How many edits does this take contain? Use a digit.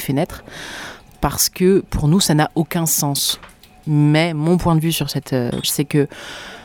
2